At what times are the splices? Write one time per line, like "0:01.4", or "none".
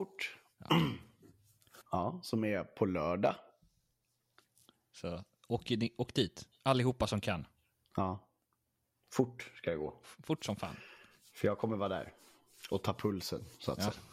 0:01.8

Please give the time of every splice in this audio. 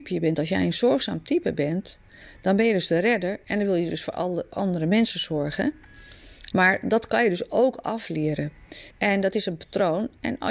0:06.5
0:08.9

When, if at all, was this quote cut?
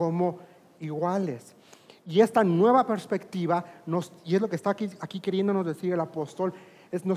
none

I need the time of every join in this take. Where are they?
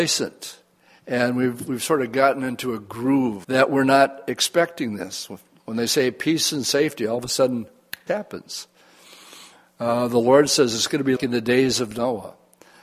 0:03.4
0:08.1
0:11.2

